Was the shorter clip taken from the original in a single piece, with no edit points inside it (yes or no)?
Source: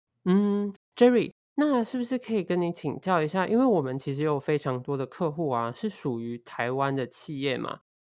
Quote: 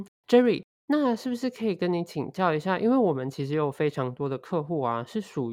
yes